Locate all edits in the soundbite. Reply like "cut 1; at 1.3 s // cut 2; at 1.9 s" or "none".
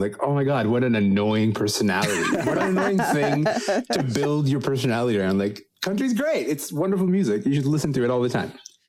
none